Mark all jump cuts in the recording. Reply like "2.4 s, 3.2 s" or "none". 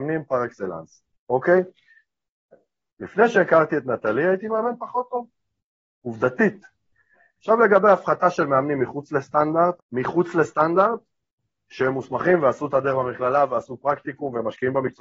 2.9 s, 7.4 s, 9.8 s